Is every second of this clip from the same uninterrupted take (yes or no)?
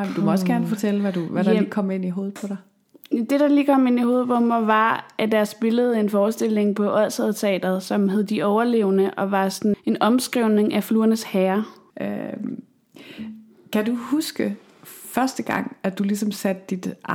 no